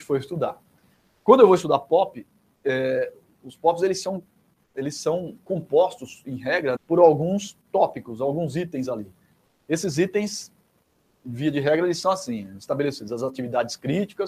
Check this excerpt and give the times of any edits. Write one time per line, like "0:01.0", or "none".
0:06.8

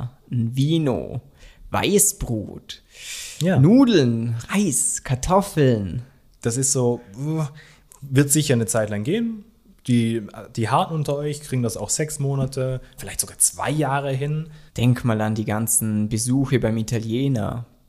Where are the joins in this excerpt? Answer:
0:13.0
0:14.7

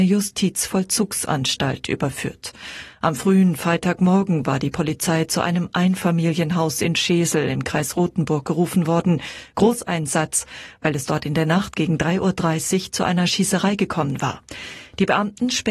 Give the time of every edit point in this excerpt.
none

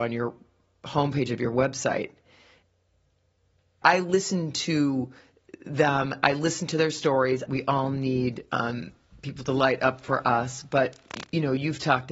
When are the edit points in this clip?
0:03.8
0:07.5

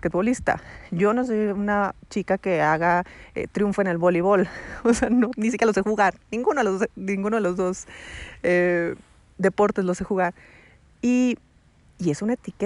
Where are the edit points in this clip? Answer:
none

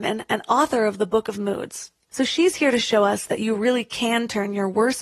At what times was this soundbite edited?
0:02.1

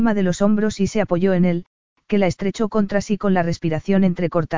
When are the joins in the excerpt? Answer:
none

